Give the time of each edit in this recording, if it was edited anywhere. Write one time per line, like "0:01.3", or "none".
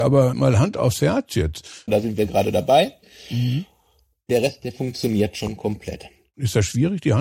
0:01.9